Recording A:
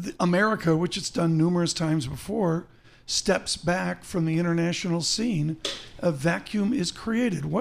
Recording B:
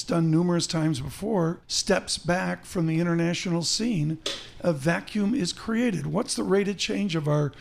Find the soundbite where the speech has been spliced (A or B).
B